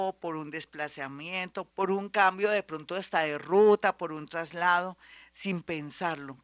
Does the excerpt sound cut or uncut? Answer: cut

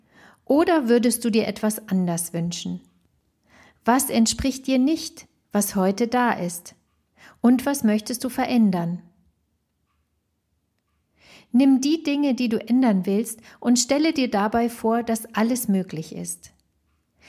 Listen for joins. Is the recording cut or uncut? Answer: uncut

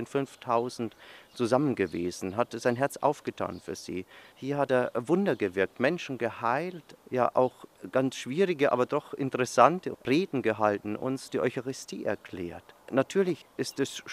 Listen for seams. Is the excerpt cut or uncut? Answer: uncut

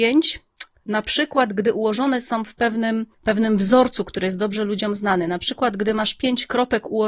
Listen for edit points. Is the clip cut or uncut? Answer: cut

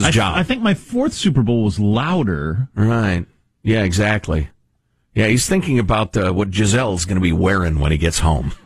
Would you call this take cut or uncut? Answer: uncut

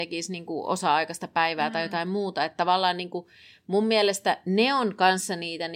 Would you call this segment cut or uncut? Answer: uncut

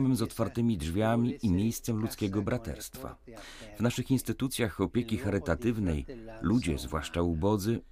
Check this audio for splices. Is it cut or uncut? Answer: uncut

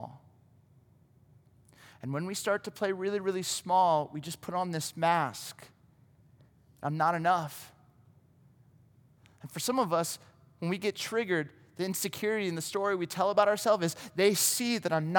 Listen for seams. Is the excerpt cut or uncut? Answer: uncut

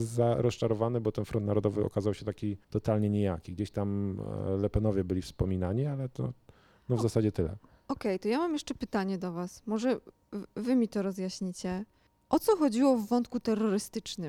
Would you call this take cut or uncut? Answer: cut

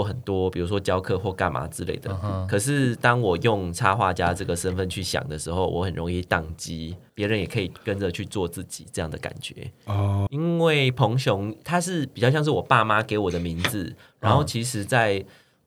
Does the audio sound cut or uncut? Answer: cut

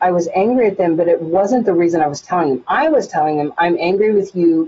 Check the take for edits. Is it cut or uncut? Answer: uncut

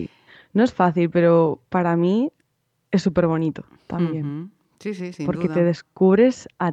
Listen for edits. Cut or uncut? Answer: uncut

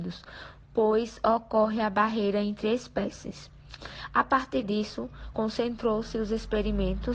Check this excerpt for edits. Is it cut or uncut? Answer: uncut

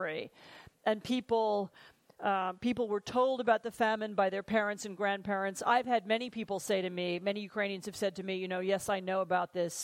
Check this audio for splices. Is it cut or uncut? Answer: uncut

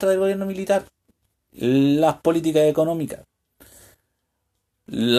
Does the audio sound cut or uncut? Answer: uncut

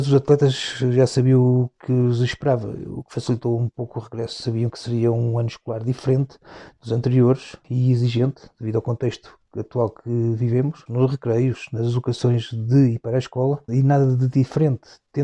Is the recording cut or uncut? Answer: cut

